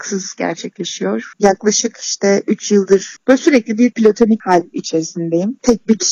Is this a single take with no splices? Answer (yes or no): yes